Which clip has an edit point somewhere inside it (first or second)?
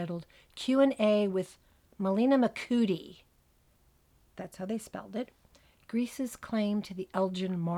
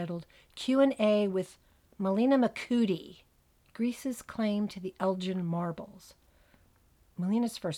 second